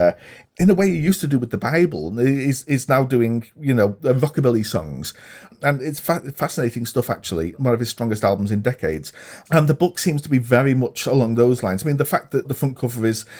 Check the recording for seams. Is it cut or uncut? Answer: uncut